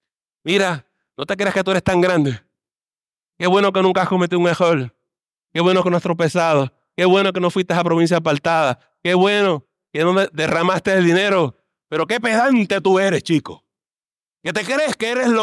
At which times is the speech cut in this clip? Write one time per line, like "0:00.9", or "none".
none